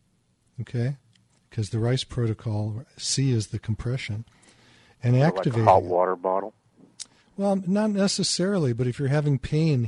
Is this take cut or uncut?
cut